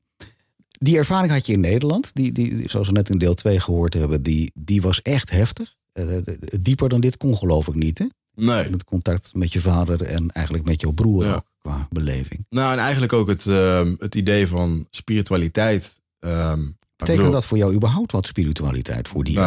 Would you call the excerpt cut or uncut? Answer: uncut